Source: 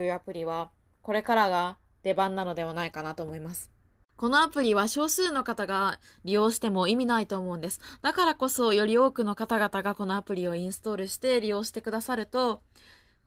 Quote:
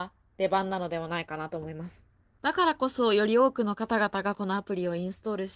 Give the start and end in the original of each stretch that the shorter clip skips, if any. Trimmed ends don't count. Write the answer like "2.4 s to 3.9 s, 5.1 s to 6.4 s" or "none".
4.0 s to 8.0 s